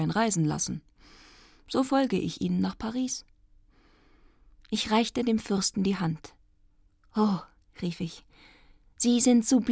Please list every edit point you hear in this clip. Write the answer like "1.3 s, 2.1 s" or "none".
none